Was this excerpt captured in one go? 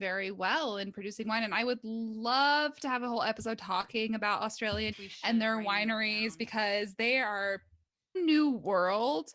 no; 2 cuts; at 4.9 s, 8.1 s

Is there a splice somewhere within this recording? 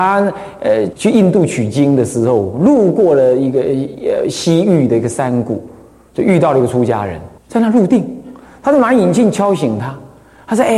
yes; 2 cuts; at 0.9 s, 7.4 s

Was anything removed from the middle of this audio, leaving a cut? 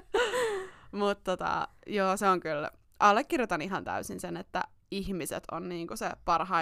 no; 0 cuts

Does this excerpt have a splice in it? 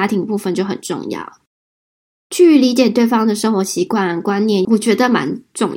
yes; 1 cut; at 4.6 s

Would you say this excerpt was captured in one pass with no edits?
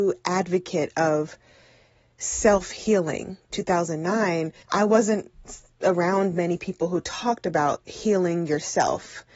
no; 2 cuts; at 3.5 s, 4.6 s

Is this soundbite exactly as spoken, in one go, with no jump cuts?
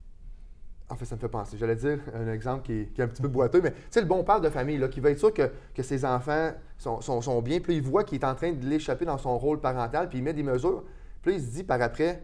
yes; 0 cuts

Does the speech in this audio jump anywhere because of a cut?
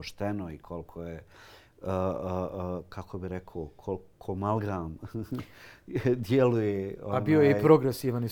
no; 0 cuts

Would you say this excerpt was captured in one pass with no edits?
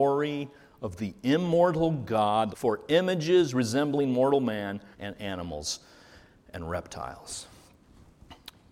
no; 2 cuts; at 2.5 s, 4.9 s

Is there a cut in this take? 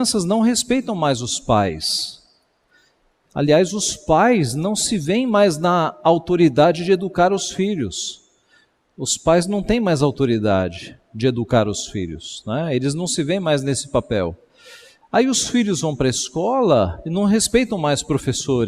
no; 0 cuts

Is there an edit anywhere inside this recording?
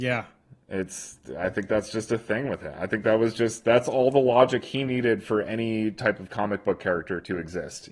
no; 0 cuts

